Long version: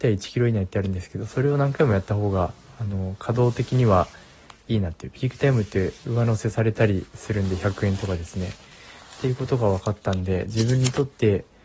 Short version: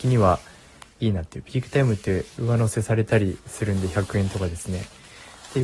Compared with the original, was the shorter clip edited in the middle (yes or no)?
no